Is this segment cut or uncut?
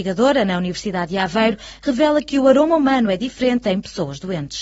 uncut